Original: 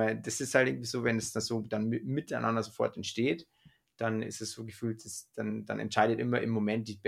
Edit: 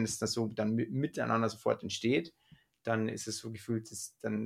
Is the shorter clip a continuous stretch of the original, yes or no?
yes